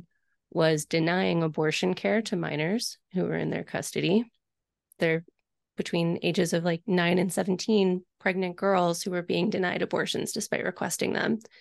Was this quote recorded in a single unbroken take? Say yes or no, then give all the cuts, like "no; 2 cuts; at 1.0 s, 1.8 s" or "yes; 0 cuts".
no; 1 cut; at 5.0 s